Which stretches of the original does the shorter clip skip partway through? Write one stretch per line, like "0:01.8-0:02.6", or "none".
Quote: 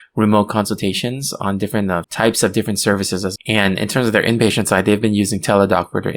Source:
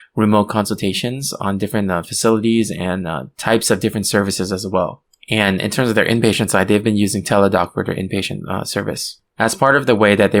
0:02.0-0:03.3
0:04.6-0:05.2